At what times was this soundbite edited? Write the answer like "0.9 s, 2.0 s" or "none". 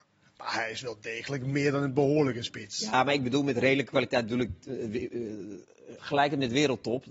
6.0 s